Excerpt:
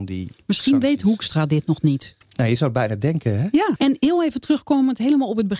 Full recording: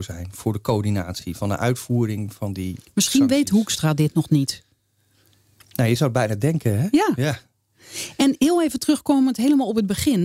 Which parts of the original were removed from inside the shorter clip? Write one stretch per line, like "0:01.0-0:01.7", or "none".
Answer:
0:04.7-0:05.6
0:07.2-0:08.1